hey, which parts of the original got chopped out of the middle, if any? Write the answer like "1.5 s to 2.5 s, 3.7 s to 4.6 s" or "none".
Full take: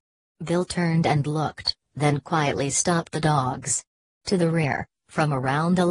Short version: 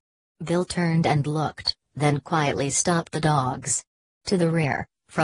none